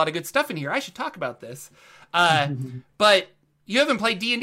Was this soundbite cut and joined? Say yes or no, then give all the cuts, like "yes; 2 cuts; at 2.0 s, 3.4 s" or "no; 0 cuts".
no; 0 cuts